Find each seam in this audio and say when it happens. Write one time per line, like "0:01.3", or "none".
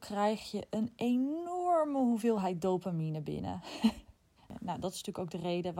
0:04.4